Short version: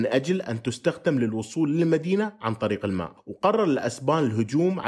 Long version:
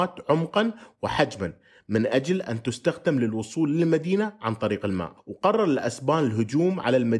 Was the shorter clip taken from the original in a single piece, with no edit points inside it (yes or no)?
yes